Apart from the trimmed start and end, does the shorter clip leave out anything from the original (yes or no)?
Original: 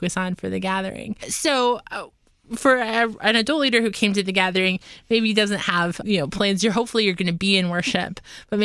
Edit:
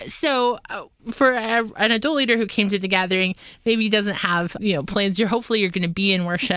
yes